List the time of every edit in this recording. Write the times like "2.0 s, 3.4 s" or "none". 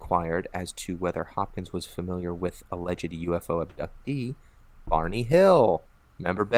none